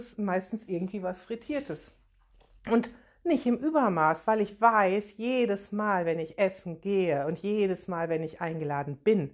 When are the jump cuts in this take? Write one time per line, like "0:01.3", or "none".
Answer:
none